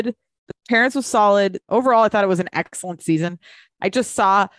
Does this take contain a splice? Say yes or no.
yes